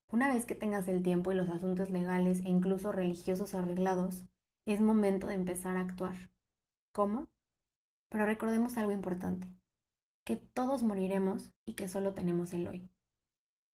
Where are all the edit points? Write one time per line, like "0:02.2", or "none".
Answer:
0:08.0
0:10.1
0:11.6